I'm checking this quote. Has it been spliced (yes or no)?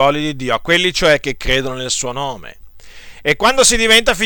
no